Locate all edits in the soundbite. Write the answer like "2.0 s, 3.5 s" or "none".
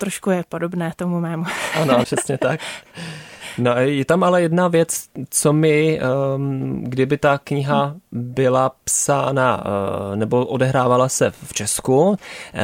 2.0 s